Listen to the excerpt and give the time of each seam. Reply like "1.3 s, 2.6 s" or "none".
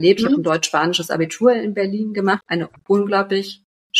2.4 s